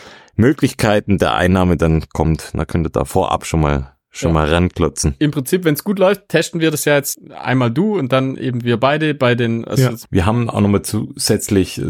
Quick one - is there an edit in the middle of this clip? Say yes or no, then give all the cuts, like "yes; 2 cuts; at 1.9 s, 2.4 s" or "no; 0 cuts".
yes; 2 cuts; at 7.1 s, 10.1 s